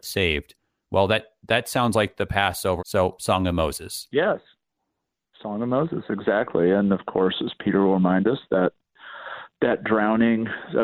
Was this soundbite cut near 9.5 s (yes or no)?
no